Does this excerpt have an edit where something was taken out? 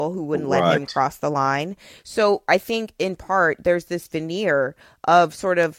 no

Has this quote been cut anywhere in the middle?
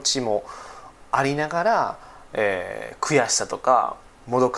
no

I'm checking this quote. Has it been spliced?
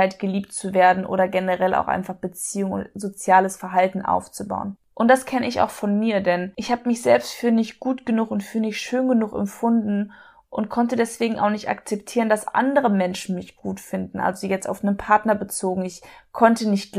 yes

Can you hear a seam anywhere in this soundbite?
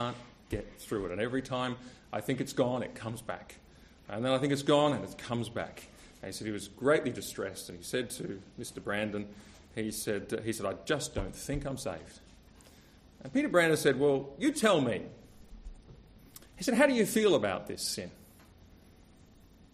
no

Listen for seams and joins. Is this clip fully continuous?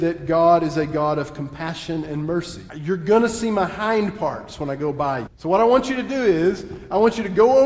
no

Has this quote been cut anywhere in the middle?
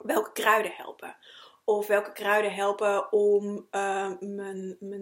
no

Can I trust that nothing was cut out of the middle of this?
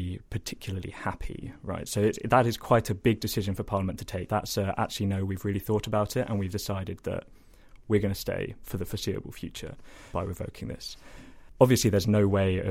no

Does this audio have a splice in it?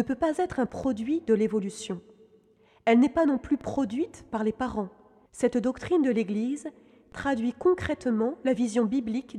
yes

